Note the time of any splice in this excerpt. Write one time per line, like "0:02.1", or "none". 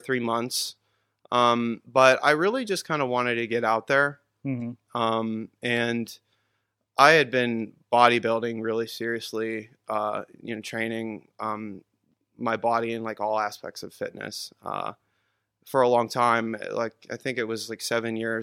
none

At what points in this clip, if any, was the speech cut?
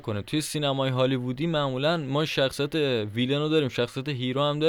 none

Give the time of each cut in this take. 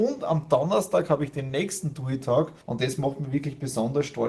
0:02.6

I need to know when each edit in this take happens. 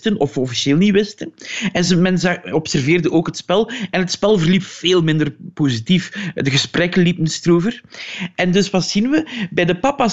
none

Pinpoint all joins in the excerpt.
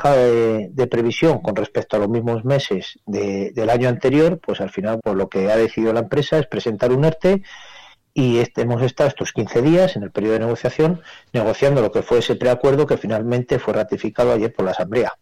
0:05.0

